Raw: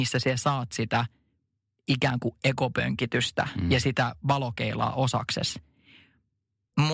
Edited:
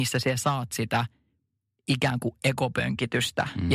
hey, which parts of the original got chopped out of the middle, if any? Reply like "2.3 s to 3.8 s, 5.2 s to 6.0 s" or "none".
none